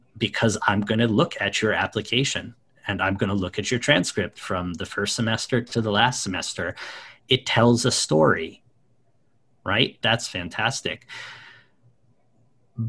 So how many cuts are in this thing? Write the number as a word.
one